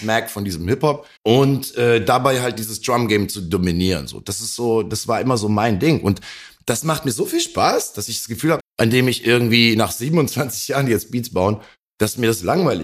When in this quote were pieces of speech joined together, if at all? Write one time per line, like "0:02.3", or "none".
0:01.2
0:08.6

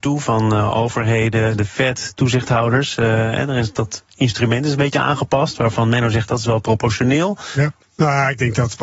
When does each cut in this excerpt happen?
0:07.8

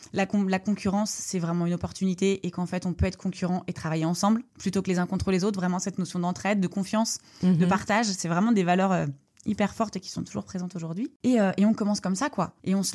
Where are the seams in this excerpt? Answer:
none

